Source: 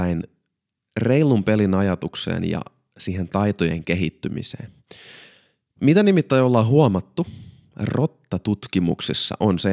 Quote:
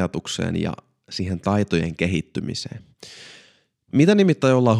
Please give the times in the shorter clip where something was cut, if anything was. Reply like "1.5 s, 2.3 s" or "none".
none

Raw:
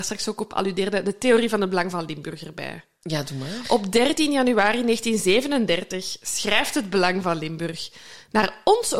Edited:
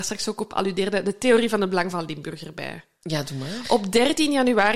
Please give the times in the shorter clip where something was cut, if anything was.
none

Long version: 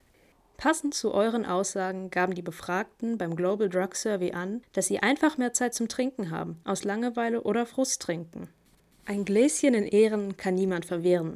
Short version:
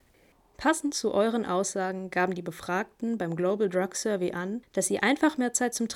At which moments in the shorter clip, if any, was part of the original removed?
none

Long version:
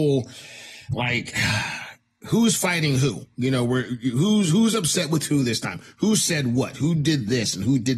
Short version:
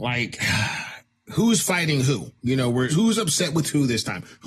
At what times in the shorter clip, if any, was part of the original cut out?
2.9 s

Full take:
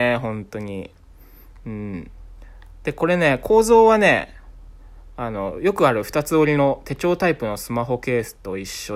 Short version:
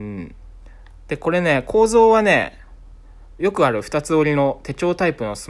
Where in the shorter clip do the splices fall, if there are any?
3.4 s

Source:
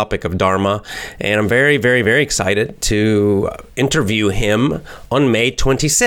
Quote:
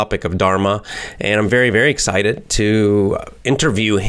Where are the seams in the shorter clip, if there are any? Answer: 1.5 s

